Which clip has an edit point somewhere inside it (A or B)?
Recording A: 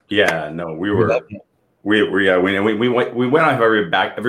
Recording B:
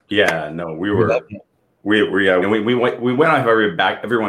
B